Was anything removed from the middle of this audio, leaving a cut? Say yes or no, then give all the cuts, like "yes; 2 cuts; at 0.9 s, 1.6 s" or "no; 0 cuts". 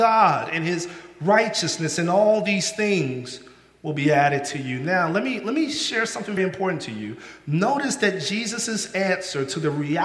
yes; 1 cut; at 6.4 s